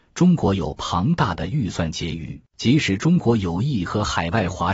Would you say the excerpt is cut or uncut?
cut